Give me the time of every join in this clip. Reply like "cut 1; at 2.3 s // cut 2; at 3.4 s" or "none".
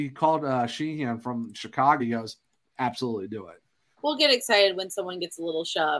cut 1; at 2.0 s // cut 2; at 3.9 s